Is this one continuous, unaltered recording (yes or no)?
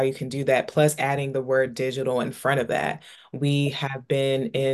yes